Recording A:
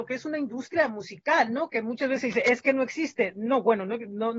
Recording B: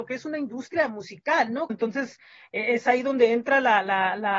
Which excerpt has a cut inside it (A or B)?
B